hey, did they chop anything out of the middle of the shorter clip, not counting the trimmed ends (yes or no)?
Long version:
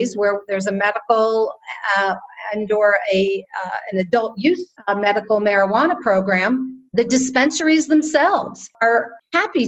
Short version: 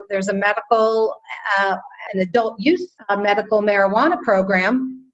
yes